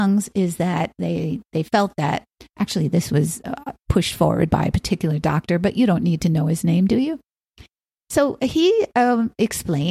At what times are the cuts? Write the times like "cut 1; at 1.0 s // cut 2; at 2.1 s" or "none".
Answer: none